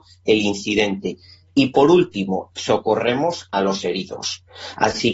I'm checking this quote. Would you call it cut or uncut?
cut